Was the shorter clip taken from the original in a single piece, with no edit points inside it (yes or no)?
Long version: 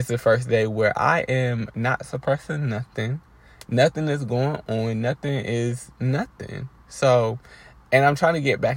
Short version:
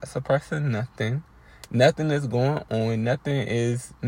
yes